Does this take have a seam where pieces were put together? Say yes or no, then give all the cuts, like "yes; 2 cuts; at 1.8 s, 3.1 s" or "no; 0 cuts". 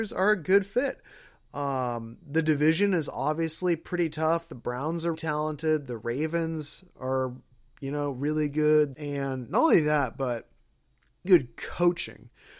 yes; 3 cuts; at 5.1 s, 8.9 s, 11.2 s